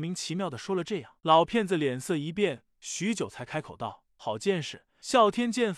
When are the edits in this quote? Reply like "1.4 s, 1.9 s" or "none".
1.2 s